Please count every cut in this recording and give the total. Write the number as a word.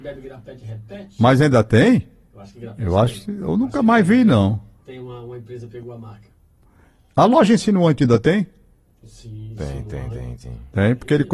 zero